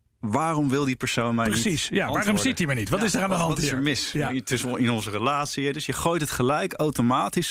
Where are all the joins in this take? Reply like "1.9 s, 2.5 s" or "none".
none